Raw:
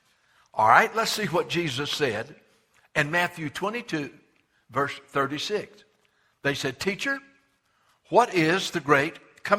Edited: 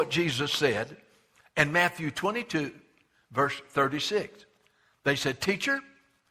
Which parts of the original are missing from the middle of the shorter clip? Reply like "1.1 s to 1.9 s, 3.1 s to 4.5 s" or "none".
none